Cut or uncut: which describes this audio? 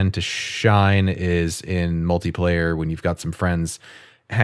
uncut